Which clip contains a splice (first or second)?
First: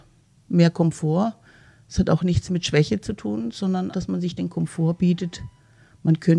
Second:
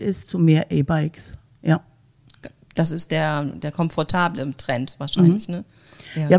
first